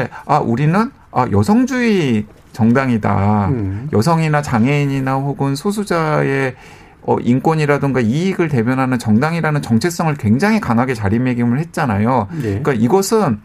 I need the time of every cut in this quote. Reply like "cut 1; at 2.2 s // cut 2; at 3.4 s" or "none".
none